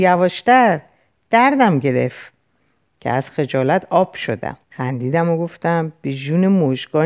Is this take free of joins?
no; 1 cut; at 4.6 s

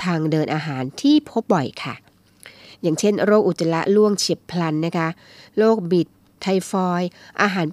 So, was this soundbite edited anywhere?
yes; 1 cut; at 1.4 s

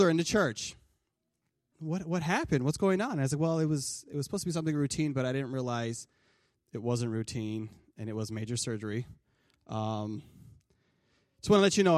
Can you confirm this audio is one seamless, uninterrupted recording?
no; 1 cut; at 1.7 s

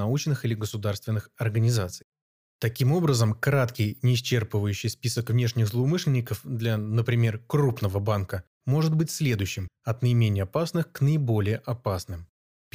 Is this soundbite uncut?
yes; 0 cuts

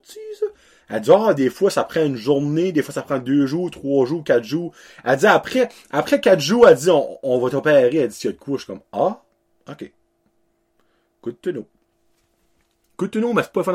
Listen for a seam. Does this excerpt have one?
no; 0 cuts

